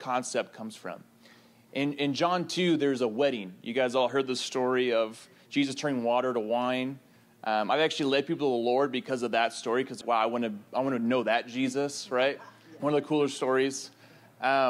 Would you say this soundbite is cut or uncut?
cut